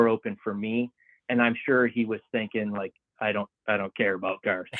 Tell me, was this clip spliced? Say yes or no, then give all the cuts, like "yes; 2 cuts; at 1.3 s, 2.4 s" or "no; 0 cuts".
no; 0 cuts